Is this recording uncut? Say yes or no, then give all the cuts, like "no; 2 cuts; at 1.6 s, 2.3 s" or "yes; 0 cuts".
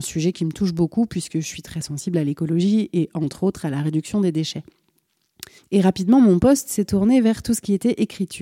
no; 1 cut; at 5.6 s